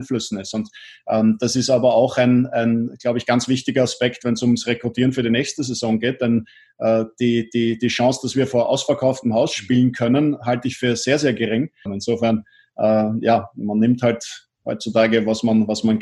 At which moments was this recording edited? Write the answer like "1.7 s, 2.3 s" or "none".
11.9 s